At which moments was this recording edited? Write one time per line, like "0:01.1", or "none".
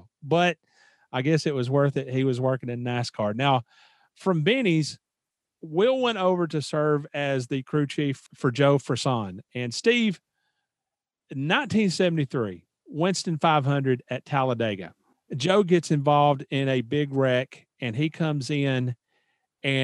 none